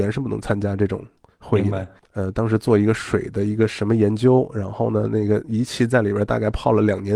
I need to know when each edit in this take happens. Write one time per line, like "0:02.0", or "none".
0:02.0